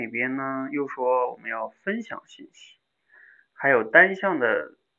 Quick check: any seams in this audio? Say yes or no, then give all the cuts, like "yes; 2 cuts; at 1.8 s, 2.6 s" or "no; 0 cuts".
no; 0 cuts